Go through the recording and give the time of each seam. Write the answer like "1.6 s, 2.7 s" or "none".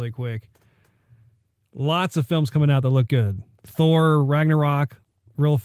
none